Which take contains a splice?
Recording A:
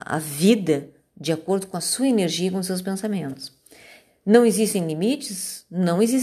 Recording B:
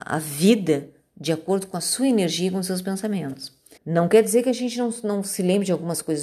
B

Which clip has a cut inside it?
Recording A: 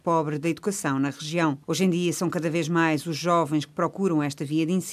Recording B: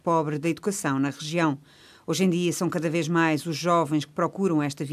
A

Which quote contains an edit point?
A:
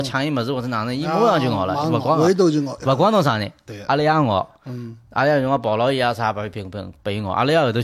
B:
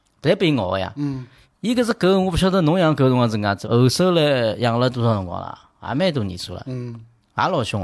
B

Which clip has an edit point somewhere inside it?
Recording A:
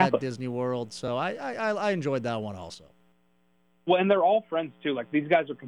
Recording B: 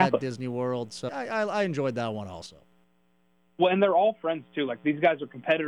B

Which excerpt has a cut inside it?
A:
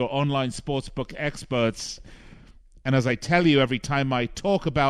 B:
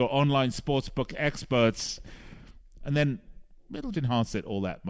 B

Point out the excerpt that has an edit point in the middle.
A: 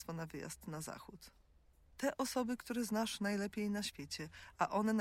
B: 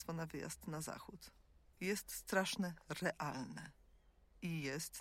B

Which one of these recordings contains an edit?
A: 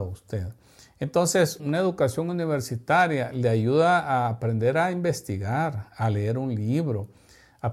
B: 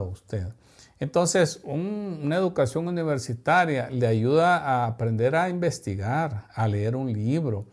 A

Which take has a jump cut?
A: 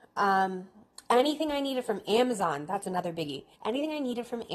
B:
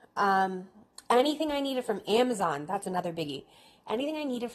A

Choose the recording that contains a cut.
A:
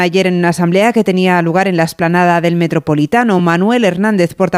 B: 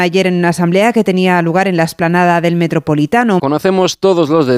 B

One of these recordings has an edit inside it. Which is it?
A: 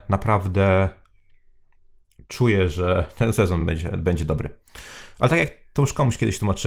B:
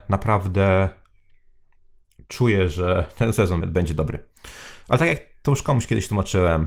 B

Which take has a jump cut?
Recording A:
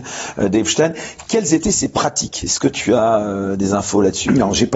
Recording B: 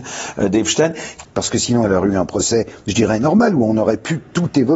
B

